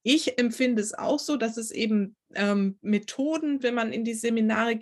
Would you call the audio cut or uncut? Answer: cut